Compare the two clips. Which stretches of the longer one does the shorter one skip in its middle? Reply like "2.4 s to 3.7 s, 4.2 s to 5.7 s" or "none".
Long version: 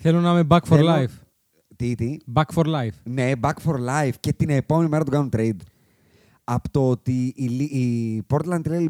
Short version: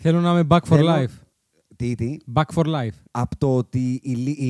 3.0 s to 6.4 s